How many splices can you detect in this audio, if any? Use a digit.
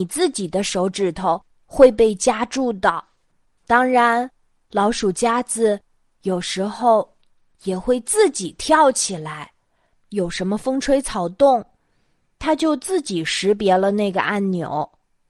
2